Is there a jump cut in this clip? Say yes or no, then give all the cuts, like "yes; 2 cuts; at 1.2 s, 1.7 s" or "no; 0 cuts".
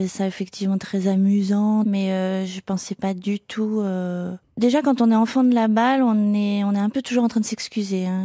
yes; 1 cut; at 1.8 s